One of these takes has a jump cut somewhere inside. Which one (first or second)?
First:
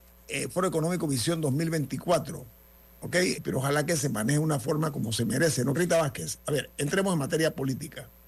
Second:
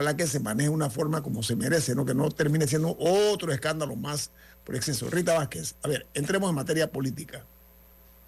first